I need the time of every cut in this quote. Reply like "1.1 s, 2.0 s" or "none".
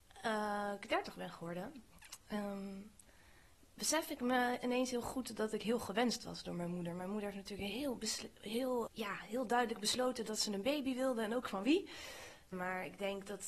8.9 s, 12.5 s